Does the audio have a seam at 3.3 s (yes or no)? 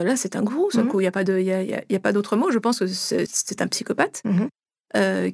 yes